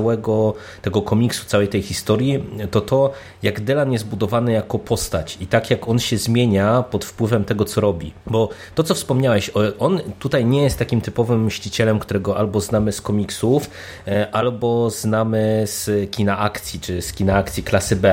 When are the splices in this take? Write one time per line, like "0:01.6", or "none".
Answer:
0:08.2